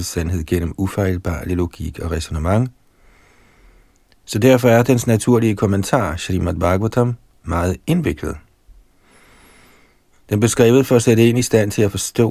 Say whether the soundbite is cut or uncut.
cut